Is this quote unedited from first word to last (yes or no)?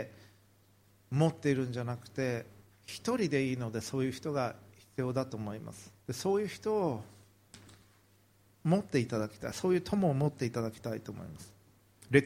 no